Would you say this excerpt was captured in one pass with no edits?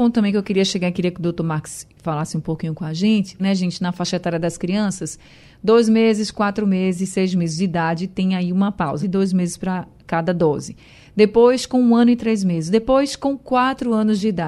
no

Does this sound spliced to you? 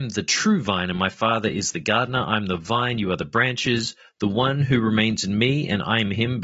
no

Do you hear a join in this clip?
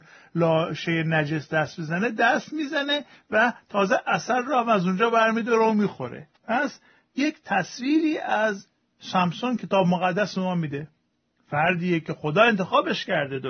yes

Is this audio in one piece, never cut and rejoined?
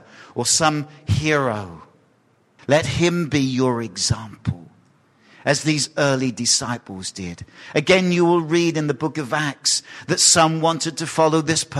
no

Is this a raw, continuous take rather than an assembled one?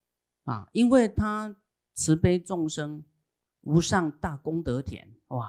no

